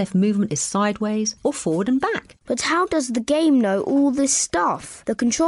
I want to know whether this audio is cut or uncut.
cut